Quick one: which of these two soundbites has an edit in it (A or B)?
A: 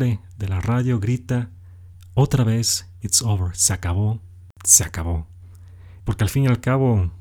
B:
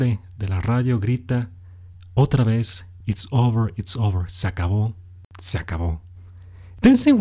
A